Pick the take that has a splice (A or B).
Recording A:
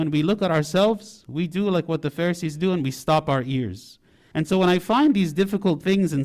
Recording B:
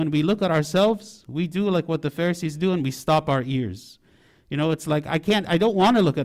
A